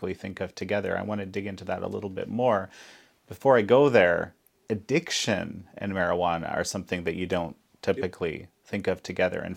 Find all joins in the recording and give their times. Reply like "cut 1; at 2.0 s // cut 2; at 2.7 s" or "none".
none